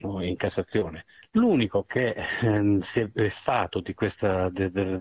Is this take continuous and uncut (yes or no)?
yes